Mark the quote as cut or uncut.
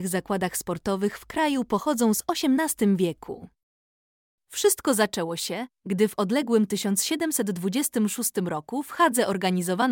uncut